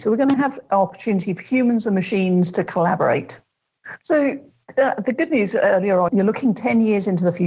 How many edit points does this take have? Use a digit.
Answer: 2